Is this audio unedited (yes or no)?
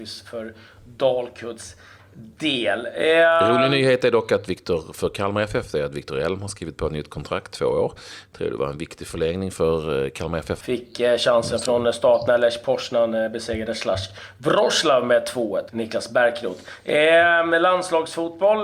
no